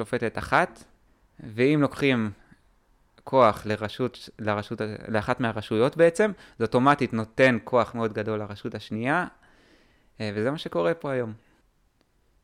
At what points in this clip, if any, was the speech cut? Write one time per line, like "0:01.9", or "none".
none

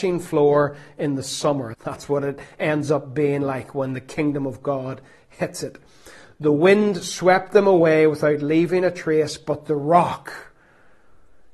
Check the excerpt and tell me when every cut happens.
0:01.7

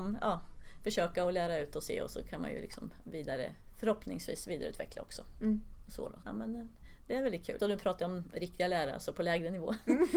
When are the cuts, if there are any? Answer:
0:06.2
0:07.6

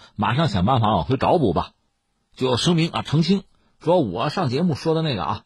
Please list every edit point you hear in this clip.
none

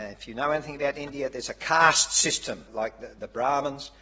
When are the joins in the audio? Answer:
0:02.7

